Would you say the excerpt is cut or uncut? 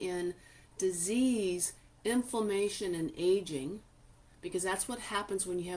uncut